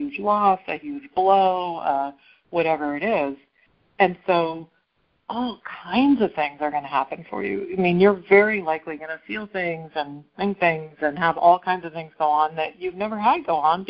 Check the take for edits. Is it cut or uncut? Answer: uncut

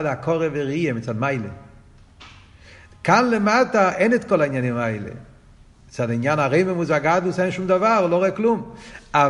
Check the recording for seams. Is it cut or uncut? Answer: uncut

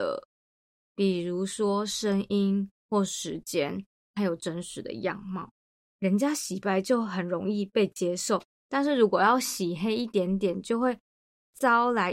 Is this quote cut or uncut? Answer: cut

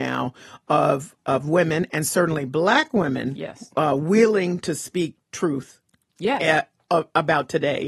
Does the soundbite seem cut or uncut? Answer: uncut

